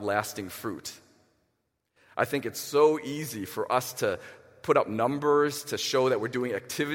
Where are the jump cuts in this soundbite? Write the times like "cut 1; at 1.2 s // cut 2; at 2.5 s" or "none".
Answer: none